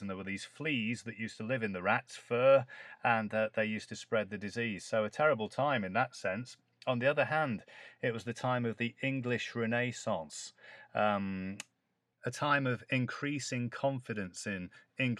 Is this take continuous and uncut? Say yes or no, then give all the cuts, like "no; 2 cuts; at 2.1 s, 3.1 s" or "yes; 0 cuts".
yes; 0 cuts